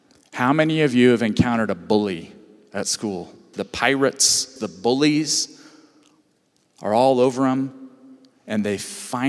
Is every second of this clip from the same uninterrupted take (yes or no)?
no